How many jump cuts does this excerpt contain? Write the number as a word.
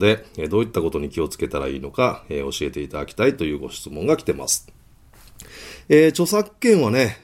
zero